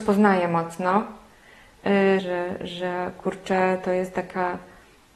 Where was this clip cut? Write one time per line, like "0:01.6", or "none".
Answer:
0:02.2